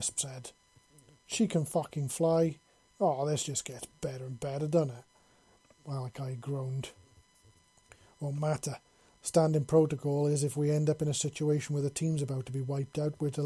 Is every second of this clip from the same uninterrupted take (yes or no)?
yes